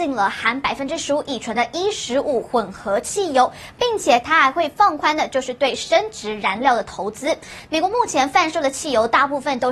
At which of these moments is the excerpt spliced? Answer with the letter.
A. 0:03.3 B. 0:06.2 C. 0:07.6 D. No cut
C